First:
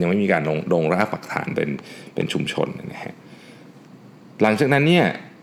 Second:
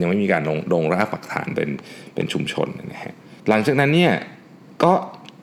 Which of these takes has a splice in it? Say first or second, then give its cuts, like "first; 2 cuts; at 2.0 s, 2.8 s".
second; 1 cut; at 3.4 s